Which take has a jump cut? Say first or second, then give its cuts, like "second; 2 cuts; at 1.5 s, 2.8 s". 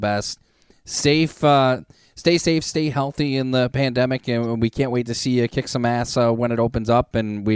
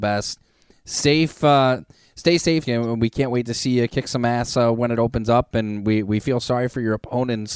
second; 1 cut; at 2.6 s